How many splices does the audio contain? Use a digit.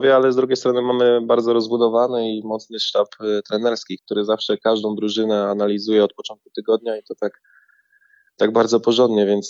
1